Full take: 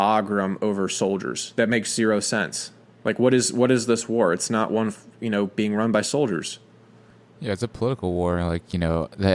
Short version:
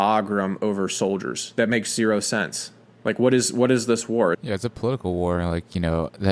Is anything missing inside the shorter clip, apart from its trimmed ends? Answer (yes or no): yes